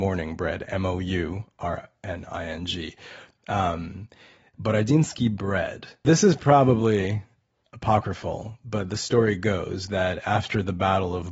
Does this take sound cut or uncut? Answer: cut